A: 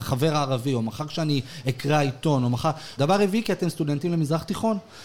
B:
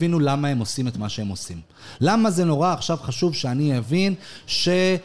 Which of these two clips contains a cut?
A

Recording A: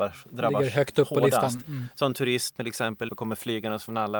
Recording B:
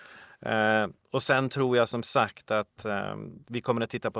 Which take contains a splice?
A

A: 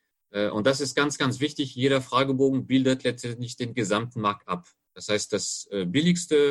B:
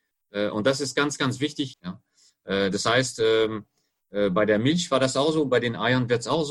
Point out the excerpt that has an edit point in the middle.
B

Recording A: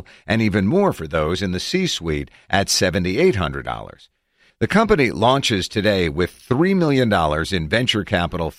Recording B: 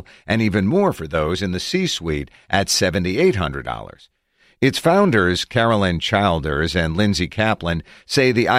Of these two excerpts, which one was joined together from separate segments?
A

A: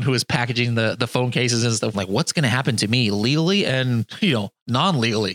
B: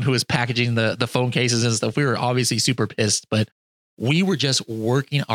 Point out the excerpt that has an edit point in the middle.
A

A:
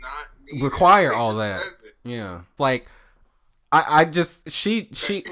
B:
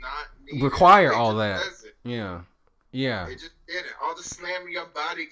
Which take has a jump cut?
A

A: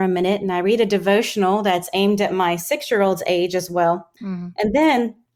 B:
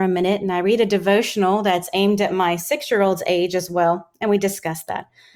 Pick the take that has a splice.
A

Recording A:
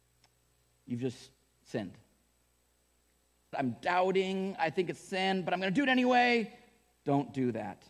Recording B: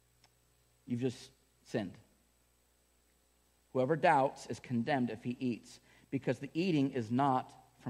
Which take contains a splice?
A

